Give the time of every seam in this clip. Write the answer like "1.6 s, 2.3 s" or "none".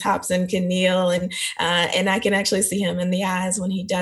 none